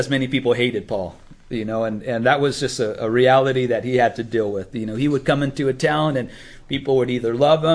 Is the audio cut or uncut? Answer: uncut